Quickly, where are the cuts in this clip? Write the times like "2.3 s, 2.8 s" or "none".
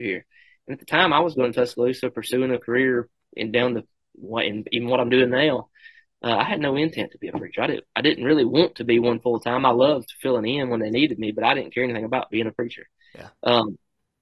none